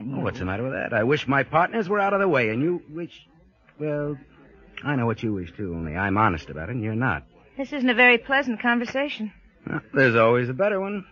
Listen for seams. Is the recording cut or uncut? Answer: uncut